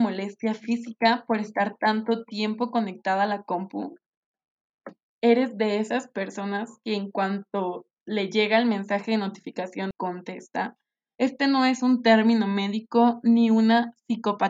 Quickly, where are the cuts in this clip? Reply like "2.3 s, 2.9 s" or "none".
5.1 s, 11.1 s